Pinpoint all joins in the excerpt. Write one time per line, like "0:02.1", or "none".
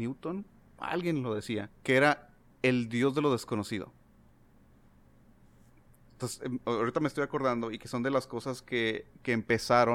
0:01.7